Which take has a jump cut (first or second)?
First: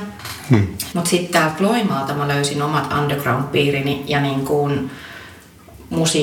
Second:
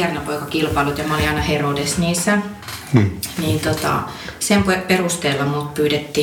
first